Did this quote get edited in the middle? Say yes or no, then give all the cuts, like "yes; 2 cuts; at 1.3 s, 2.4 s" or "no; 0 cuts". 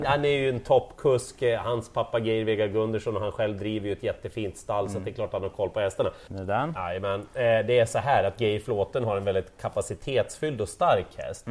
yes; 1 cut; at 6.3 s